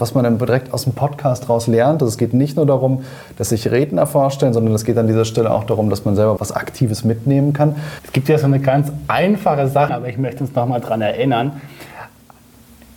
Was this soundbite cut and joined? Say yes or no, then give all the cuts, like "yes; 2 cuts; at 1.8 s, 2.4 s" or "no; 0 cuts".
yes; 3 cuts; at 6.4 s, 8.0 s, 9.9 s